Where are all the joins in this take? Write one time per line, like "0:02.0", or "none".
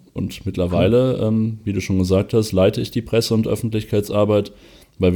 none